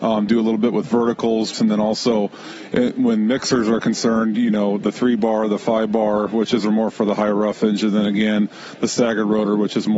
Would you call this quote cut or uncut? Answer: cut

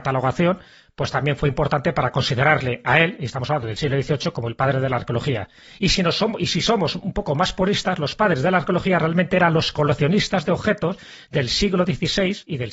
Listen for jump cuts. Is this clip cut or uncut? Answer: uncut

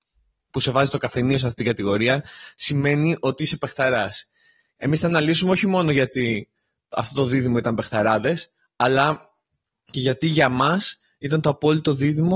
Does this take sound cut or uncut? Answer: uncut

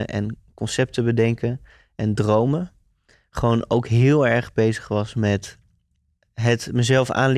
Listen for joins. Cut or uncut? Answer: uncut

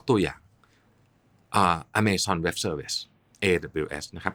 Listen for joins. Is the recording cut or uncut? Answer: uncut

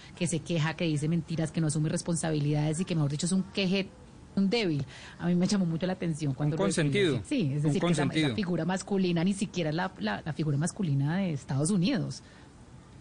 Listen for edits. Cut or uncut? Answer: cut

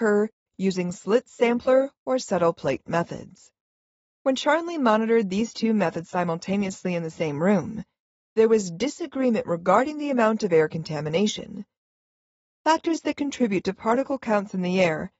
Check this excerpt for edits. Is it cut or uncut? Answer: uncut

